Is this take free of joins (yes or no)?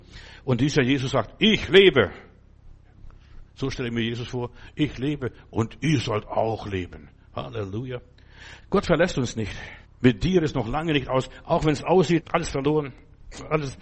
no